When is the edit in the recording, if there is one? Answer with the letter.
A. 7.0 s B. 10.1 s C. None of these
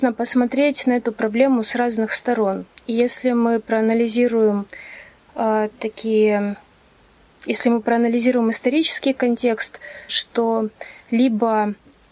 B